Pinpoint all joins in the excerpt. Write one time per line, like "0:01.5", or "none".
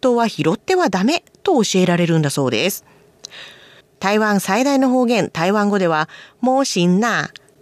0:03.8